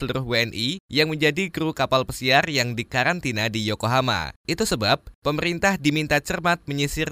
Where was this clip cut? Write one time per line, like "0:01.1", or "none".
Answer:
0:04.4